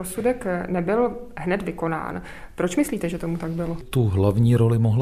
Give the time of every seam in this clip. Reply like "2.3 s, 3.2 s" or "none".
none